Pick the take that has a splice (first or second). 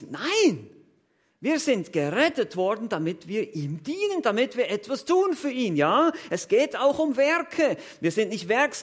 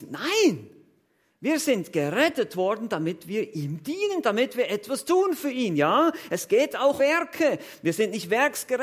second